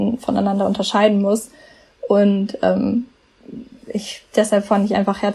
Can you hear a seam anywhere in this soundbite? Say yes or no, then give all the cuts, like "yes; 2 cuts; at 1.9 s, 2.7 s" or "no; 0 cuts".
no; 0 cuts